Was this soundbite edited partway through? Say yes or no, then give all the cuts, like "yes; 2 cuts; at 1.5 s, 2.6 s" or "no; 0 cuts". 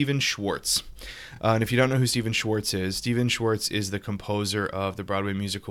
no; 0 cuts